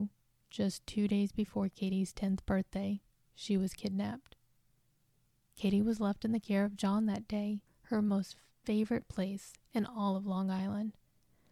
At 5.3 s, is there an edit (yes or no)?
no